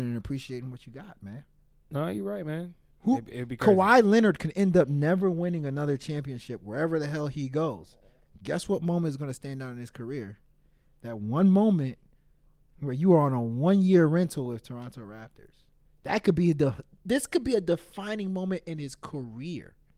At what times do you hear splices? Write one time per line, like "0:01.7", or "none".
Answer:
0:02.9